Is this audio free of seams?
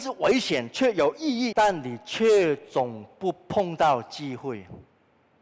no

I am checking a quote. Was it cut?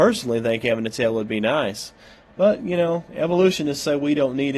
no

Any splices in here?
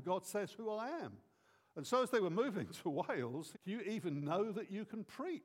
yes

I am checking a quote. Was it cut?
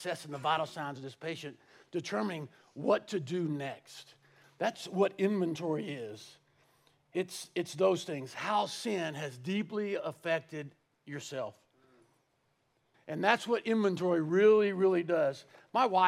yes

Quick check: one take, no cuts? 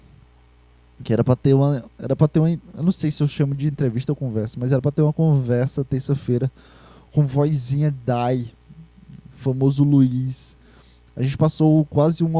yes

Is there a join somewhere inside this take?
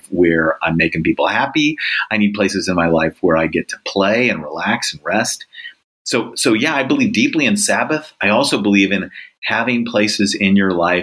no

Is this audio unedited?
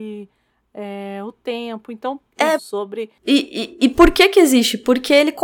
no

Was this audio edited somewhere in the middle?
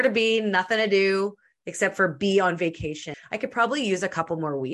yes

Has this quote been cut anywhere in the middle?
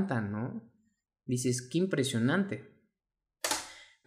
no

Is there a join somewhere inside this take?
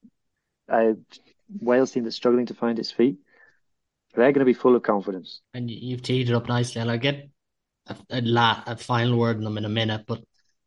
yes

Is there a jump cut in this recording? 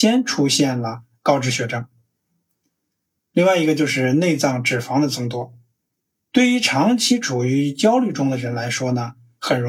no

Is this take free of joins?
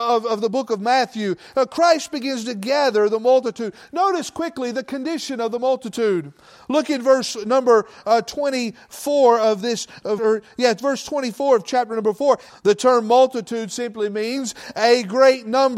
no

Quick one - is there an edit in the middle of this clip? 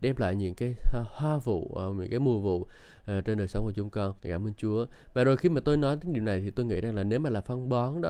yes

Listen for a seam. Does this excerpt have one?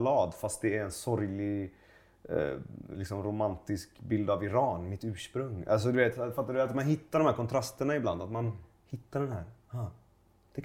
no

